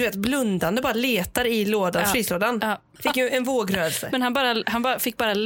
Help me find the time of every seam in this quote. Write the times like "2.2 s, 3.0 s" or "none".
3.0 s